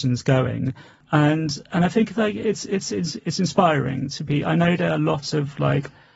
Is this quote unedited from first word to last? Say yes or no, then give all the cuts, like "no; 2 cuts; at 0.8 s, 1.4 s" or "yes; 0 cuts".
yes; 0 cuts